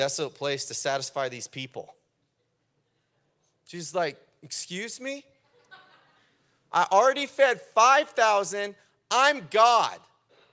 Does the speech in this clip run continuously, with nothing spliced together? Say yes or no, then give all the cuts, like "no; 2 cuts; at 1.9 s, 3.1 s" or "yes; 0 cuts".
yes; 0 cuts